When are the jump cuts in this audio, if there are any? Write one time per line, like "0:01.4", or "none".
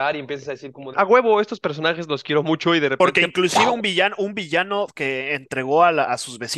0:00.9

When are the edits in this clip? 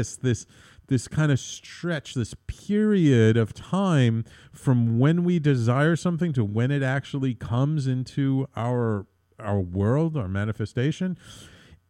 none

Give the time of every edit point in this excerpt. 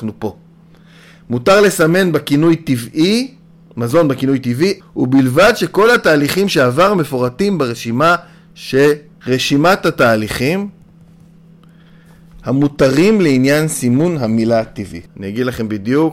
0:04.8
0:09.2
0:15.1

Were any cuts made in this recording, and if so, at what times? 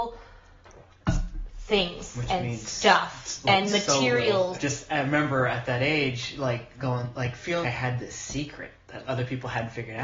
0:04.5
0:07.6
0:09.0

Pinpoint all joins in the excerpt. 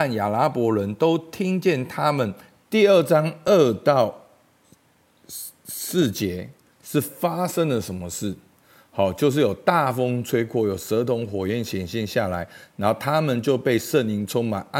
0:02.6

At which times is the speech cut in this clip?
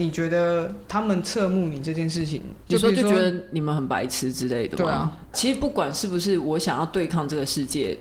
0:02.6
0:05.3

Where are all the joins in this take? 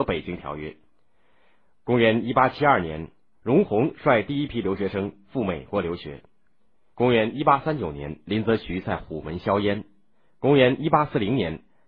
0:06.9

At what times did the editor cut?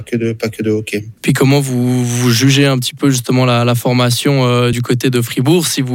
none

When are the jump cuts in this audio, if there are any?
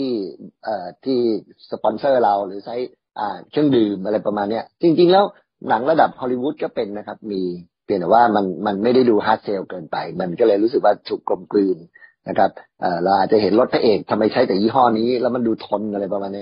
none

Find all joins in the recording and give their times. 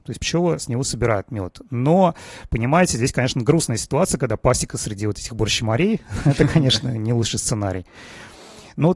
none

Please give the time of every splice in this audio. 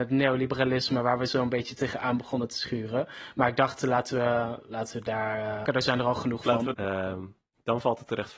0:05.7
0:06.7

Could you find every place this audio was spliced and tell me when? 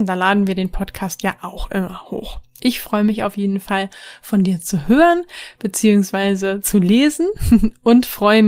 none

